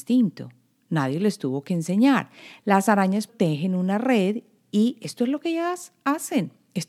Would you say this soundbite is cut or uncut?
cut